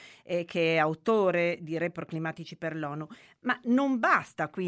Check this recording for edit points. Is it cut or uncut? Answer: uncut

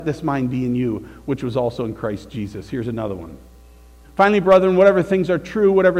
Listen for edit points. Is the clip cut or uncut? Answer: cut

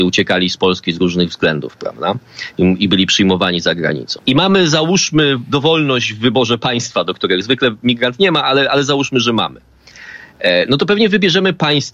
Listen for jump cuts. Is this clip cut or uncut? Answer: cut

